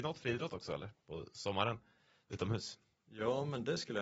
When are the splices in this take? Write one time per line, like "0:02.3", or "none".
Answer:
none